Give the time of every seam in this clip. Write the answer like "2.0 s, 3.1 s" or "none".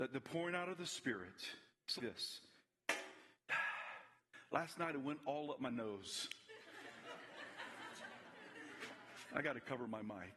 2.0 s